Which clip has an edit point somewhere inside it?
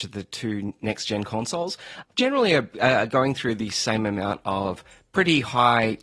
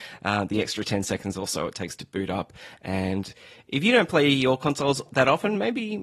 first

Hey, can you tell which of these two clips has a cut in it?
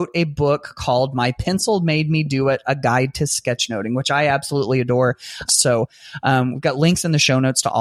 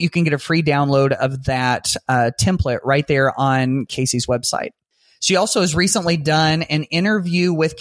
first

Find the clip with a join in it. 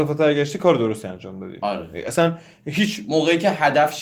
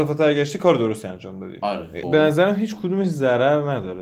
second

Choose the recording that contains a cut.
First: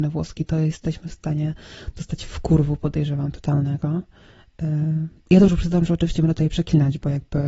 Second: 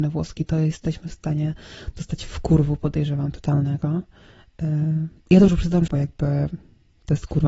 second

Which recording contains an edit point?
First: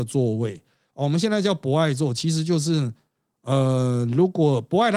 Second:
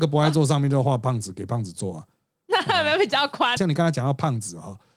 second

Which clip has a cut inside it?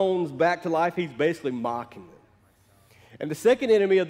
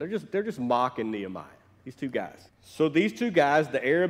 second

